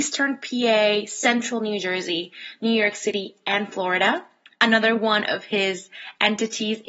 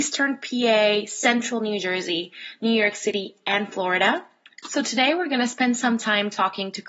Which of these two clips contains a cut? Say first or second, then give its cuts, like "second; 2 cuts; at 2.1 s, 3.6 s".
second; 1 cut; at 4.6 s